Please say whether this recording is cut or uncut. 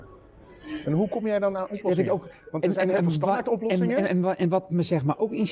uncut